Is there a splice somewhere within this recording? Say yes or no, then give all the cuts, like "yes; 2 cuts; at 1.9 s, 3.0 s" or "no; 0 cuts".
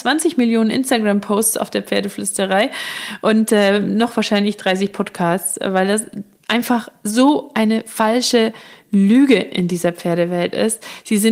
no; 0 cuts